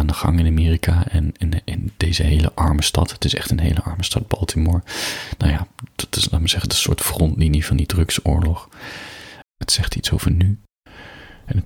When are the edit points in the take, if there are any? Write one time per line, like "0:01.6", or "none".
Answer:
0:09.4